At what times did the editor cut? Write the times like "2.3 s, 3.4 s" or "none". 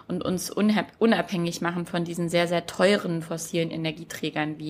none

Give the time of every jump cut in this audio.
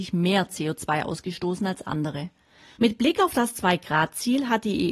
2.8 s

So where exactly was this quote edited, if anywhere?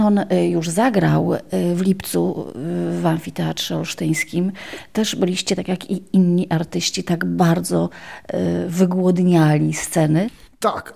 none

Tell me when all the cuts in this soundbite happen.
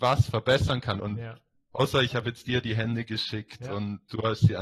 1.0 s

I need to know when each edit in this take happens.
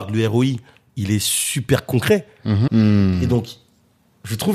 2.7 s

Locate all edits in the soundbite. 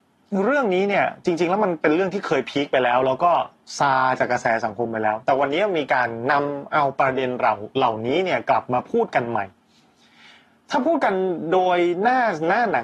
none

